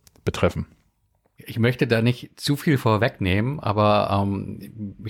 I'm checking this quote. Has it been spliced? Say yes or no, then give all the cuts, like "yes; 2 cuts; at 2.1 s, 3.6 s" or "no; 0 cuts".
no; 0 cuts